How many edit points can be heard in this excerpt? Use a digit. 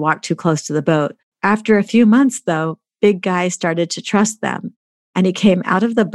1